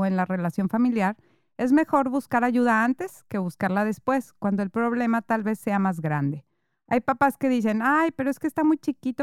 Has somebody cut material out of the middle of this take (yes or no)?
no